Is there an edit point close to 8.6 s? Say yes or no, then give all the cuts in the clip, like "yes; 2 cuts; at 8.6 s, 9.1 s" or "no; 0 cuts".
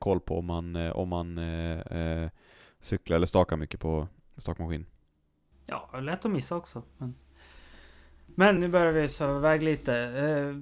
yes; 1 cut; at 8.6 s